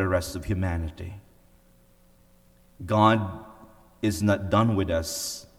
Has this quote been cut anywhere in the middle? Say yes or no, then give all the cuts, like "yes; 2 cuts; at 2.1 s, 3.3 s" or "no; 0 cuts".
no; 0 cuts